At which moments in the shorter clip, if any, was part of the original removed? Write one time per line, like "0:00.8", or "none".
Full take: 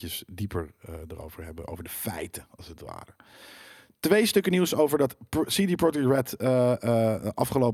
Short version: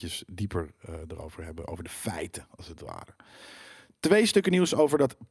none